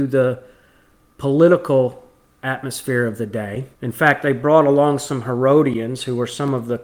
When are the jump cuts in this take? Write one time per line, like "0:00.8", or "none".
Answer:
0:03.7